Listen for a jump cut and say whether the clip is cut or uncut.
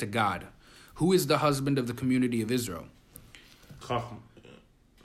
cut